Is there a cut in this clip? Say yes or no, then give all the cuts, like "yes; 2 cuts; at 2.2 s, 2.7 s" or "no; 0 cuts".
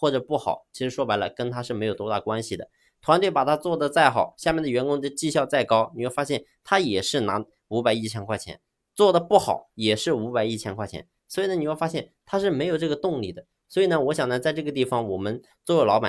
no; 0 cuts